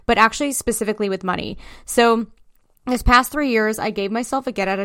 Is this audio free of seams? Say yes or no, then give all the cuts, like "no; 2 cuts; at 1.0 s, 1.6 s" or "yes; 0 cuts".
yes; 0 cuts